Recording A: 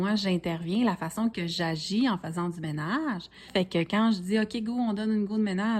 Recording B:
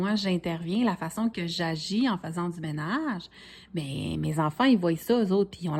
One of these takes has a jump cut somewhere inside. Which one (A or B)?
A